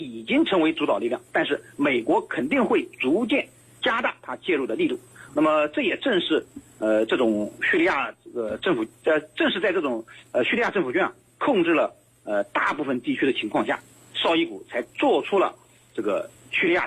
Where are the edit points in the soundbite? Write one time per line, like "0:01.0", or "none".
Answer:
0:05.3